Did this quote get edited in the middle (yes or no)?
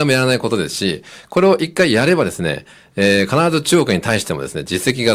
no